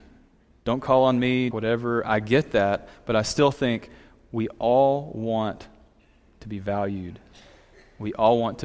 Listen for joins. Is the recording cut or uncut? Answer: cut